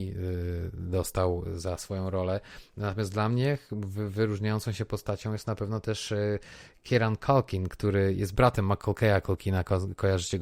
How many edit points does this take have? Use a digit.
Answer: 0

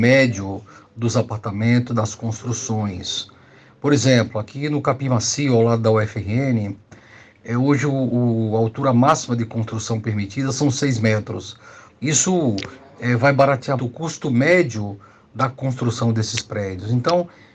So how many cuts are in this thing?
2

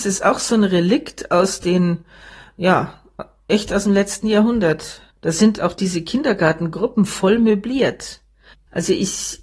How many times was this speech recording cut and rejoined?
1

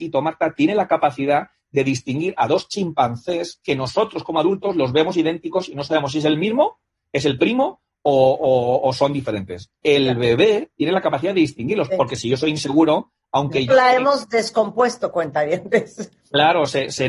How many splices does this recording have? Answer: 2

